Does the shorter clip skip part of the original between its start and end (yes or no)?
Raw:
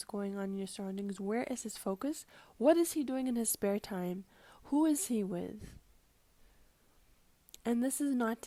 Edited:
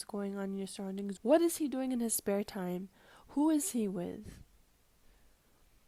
yes